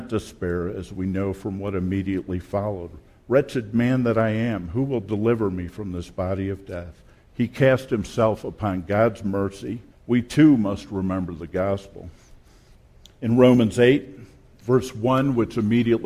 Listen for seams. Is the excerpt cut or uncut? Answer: cut